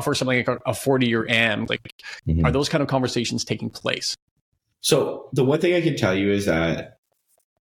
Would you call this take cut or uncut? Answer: cut